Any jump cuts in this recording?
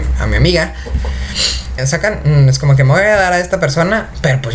yes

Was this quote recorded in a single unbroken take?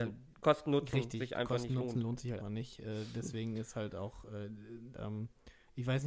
no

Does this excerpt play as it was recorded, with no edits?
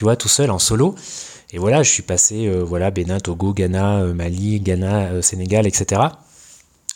yes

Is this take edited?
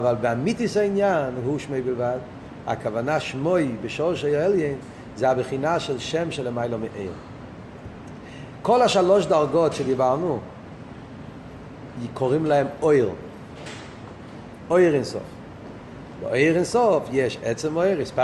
no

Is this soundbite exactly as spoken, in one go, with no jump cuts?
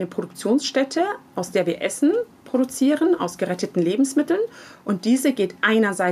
yes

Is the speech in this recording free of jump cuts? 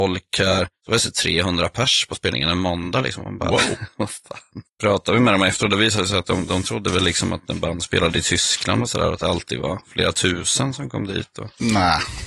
yes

